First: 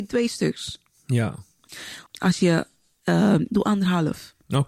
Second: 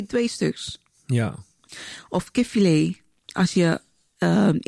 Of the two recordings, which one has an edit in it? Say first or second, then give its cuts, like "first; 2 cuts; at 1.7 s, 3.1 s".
first; 2 cuts; at 2.1 s, 3.5 s